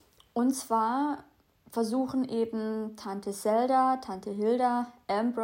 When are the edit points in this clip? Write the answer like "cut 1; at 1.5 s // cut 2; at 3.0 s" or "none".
none